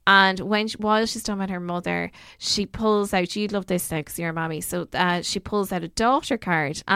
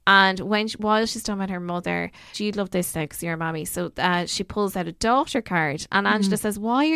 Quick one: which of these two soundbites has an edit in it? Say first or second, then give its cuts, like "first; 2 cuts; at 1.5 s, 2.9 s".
second; 1 cut; at 2.3 s